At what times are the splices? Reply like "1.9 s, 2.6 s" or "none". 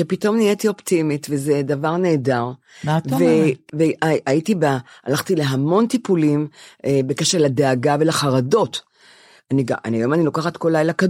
none